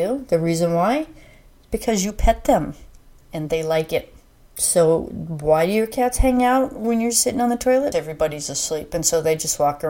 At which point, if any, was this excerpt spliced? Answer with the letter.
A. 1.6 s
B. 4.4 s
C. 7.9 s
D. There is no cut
C